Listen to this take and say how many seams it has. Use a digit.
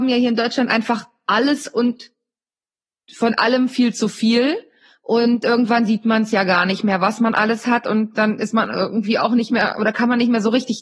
0